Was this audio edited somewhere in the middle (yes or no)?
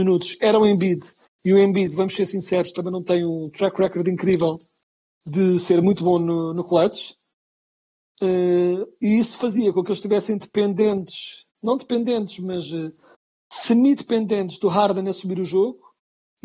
no